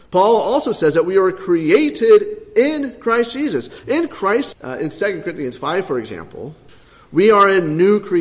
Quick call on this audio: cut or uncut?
cut